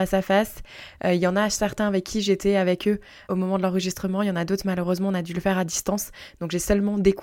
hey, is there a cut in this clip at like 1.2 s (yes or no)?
no